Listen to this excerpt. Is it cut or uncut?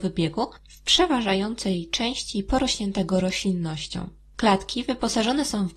cut